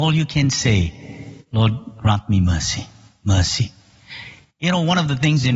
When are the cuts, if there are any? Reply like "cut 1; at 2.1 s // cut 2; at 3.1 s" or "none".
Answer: none

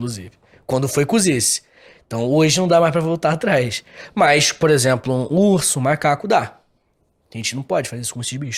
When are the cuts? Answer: cut 1; at 5.3 s

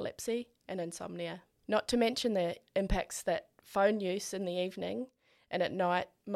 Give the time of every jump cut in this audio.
none

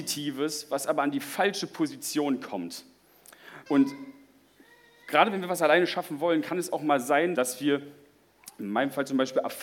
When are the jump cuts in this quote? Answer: cut 1; at 3.7 s // cut 2; at 7.3 s

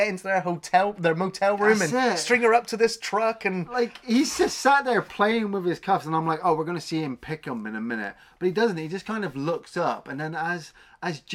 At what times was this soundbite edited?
none

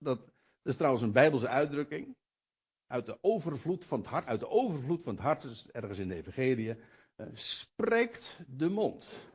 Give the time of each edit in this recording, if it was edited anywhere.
cut 1; at 4.2 s

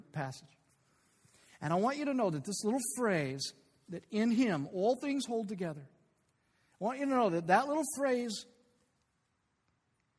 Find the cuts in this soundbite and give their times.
none

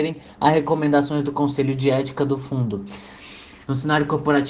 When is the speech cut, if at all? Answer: cut 1; at 3.6 s

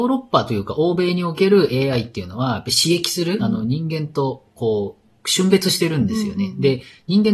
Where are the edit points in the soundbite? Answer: cut 1; at 3.4 s

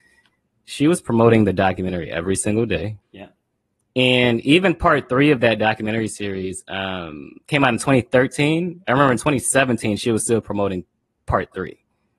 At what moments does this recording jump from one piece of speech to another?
cut 1; at 3.0 s

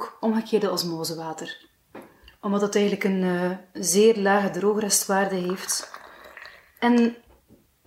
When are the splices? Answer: cut 1; at 6.8 s

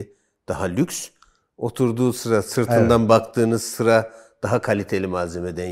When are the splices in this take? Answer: none

